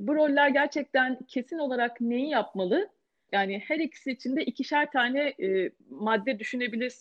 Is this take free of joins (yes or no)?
no